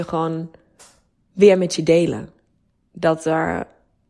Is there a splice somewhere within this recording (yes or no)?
no